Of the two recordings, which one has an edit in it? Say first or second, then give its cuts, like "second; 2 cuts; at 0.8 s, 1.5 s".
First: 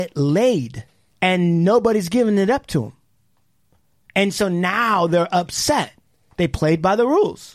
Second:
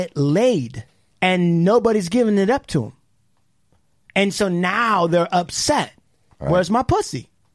second; 1 cut; at 6.3 s